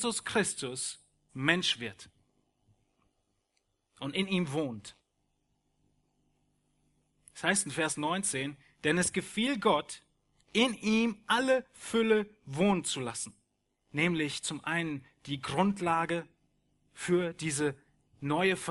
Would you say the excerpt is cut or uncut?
cut